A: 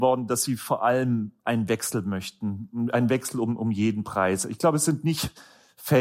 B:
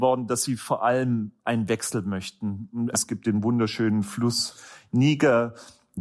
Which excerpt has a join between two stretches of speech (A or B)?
B